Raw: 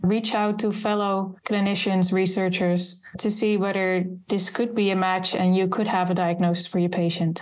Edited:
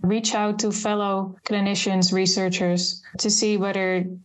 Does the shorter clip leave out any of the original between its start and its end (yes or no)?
no